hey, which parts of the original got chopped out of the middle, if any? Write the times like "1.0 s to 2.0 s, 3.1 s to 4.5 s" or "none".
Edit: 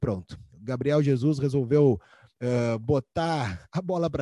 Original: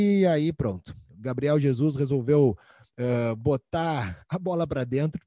none